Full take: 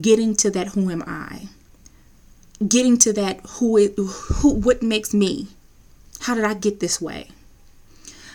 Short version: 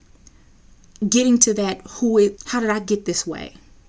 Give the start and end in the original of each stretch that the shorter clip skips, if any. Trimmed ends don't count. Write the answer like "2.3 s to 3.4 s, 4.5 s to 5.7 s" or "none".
4.0 s to 6.1 s